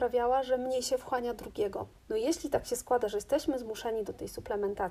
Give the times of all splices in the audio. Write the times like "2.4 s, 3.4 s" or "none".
1.9 s

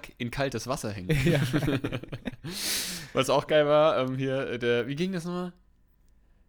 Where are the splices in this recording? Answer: none

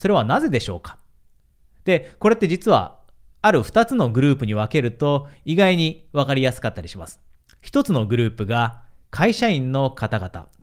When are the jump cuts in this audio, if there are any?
none

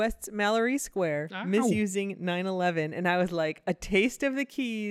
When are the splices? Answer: none

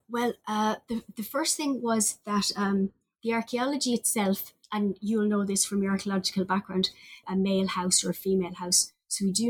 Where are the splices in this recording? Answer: 4.6 s, 7.2 s

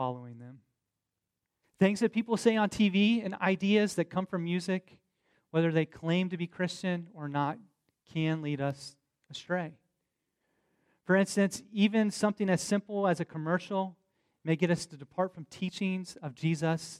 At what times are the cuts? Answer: 1.6 s

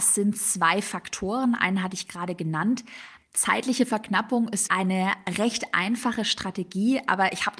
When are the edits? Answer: 3.2 s, 4.7 s

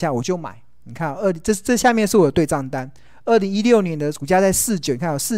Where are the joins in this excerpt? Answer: none

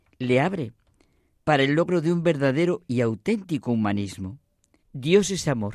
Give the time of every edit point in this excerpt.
4.8 s

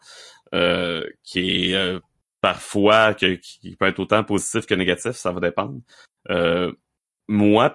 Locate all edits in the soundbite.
none

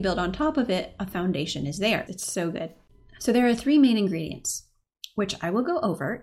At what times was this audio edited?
2.1 s

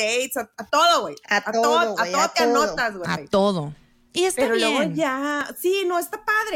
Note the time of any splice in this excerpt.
none

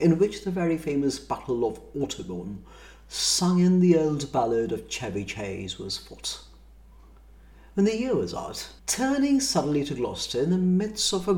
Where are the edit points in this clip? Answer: 8.8 s

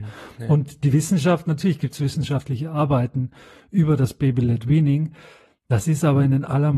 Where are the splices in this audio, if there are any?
none

